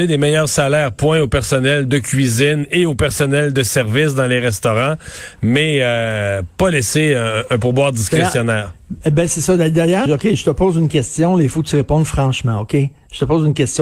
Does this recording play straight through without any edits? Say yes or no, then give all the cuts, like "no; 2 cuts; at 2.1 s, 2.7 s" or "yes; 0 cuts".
no; 1 cut; at 10.1 s